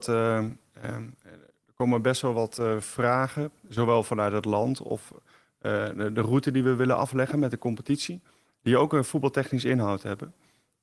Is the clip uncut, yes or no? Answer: yes